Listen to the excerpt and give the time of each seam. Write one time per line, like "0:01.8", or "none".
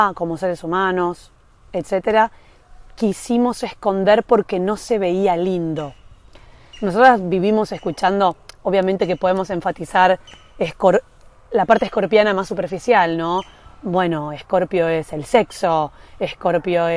none